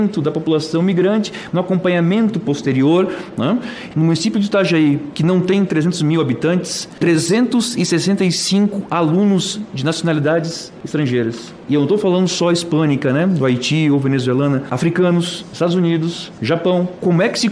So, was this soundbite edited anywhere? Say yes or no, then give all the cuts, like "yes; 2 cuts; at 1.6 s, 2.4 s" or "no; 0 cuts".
yes; 1 cut; at 1.5 s